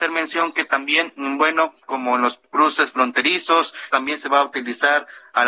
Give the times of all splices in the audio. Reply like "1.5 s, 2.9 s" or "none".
1.8 s, 3.9 s